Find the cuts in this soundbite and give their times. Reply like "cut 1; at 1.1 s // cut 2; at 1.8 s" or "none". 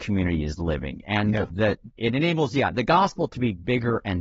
cut 1; at 1.9 s